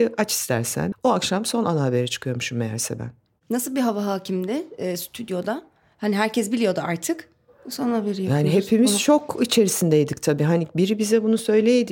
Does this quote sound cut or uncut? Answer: cut